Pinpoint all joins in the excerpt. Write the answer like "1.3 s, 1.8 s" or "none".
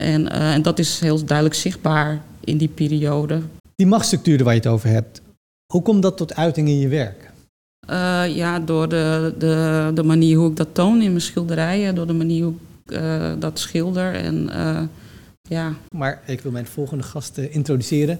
15.9 s